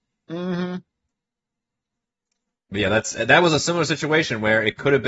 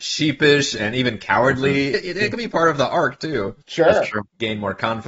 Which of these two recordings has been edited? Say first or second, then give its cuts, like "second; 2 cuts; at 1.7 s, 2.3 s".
second; 2 cuts; at 1.9 s, 3.6 s